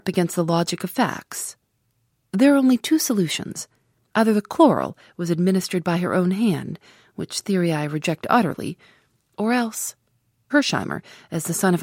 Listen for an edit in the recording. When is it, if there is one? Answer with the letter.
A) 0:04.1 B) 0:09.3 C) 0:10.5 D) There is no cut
C